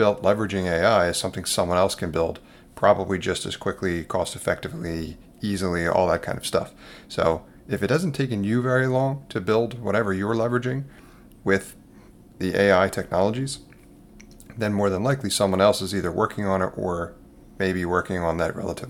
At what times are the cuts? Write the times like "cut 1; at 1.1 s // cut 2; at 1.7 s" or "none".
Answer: none